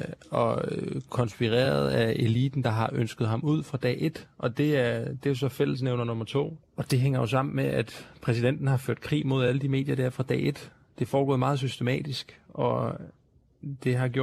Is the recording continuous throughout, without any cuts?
no; 1 cut; at 6.6 s

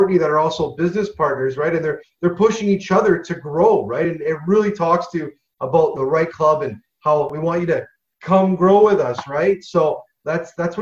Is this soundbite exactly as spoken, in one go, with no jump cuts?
yes; 0 cuts

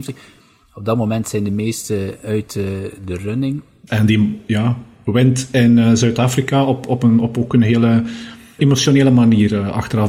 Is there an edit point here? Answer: yes; 2 cuts; at 3.9 s, 8.6 s

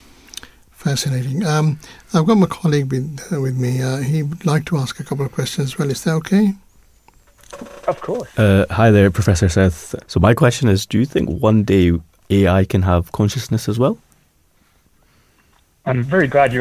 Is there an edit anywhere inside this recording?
yes; 2 cuts; at 8.3 s, 10.0 s

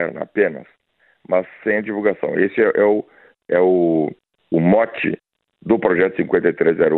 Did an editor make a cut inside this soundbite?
no; 0 cuts

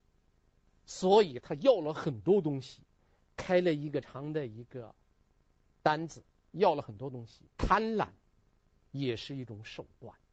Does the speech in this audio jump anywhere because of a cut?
yes; 2 cuts; at 4.0 s, 7.5 s

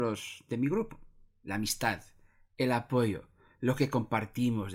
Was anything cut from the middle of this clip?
no; 0 cuts

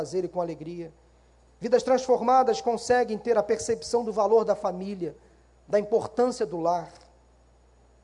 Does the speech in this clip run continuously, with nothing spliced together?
yes; 0 cuts

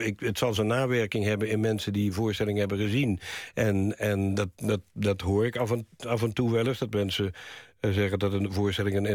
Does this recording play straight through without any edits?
yes; 0 cuts

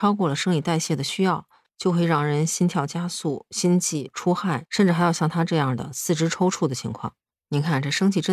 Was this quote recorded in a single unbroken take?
no; 2 cuts; at 1.7 s, 4.6 s

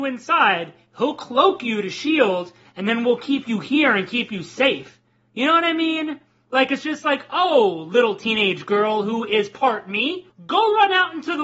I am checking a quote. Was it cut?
no; 0 cuts

